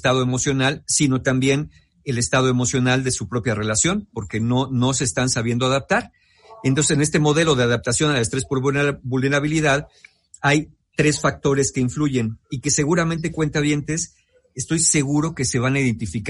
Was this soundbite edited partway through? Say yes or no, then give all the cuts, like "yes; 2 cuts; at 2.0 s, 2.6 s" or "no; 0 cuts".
no; 0 cuts